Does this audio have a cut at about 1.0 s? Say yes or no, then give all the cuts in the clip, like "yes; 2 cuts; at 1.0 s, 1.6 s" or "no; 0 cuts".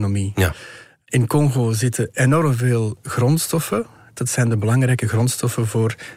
no; 1 cut; at 4.2 s